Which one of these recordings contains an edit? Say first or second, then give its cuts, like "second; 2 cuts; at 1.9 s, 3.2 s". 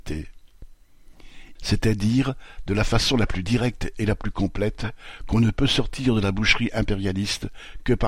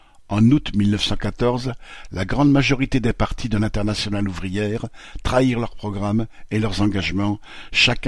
first; 1 cut; at 1.6 s